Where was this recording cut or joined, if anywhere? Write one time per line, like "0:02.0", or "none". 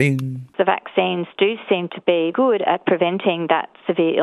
0:02.3